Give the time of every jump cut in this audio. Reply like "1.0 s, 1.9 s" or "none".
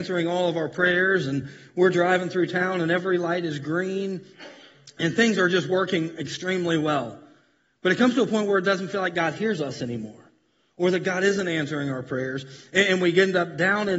none

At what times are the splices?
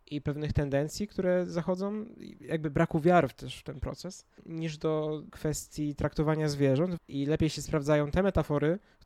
7.0 s

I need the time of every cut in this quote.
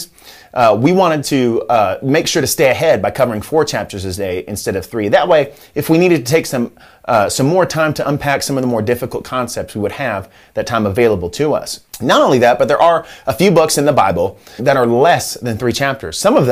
11.9 s, 14.6 s

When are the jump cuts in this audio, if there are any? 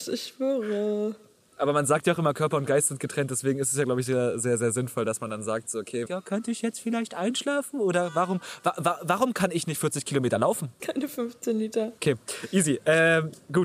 6.1 s, 10.8 s, 12.0 s

